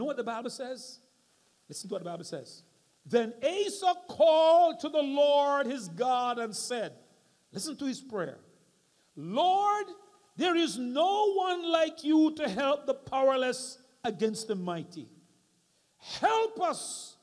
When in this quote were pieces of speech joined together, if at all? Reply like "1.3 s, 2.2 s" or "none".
none